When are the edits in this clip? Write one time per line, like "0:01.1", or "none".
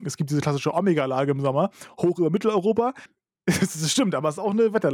0:03.1